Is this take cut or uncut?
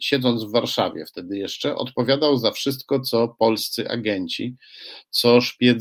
uncut